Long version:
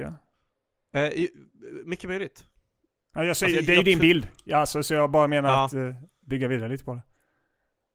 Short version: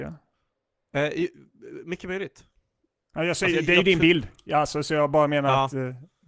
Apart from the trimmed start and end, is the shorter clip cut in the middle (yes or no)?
no